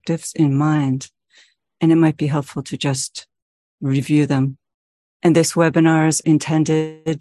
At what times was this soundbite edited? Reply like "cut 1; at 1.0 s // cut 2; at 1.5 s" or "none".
cut 1; at 5.0 s // cut 2; at 6.2 s